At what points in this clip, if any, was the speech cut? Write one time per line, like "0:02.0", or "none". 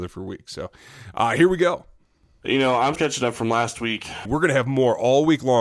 0:02.9
0:04.2